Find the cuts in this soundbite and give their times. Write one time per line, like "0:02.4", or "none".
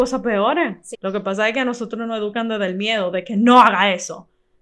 0:00.9